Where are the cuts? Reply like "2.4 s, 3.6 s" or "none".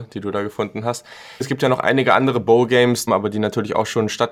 1.4 s, 3.1 s